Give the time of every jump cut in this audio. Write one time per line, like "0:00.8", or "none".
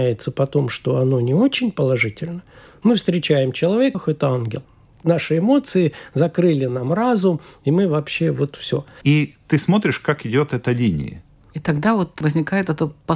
0:03.9
0:09.0
0:11.4

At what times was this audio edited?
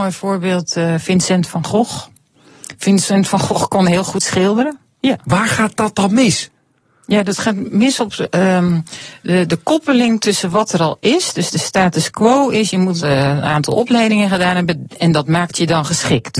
0:05.0

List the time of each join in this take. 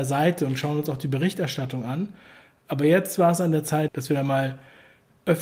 0:03.9

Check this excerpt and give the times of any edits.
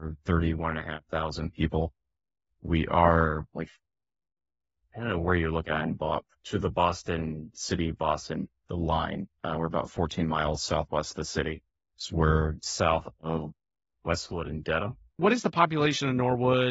0:12.6
0:15.2

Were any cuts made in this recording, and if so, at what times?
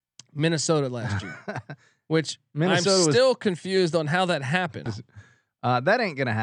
0:04.9

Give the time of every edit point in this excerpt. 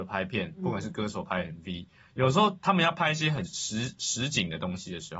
0:03.5

